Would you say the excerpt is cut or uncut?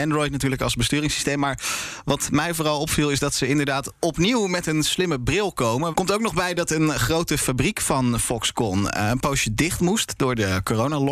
cut